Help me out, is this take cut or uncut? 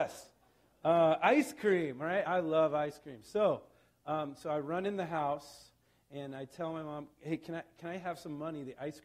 uncut